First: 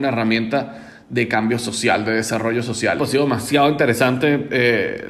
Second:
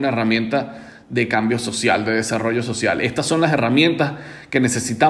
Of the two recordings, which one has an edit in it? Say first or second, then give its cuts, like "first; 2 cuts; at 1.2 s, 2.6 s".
first; 1 cut; at 3.0 s